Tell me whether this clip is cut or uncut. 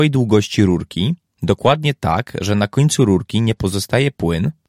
uncut